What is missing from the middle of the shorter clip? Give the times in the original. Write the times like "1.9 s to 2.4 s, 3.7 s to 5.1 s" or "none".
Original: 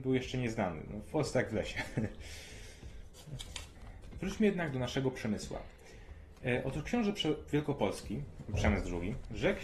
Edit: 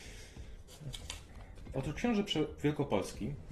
4.2 s to 6.6 s